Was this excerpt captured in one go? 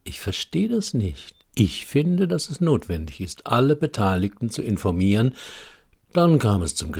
no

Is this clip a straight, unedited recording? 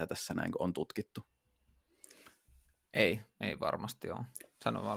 yes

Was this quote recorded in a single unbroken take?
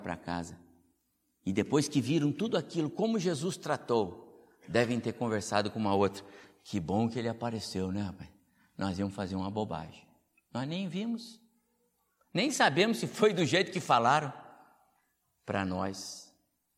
yes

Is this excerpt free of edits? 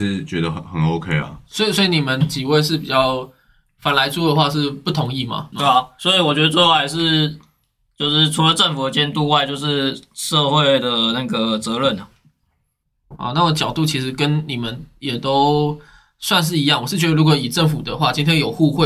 no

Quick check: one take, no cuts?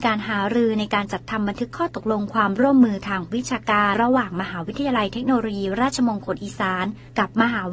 no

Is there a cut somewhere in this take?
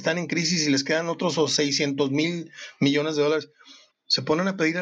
yes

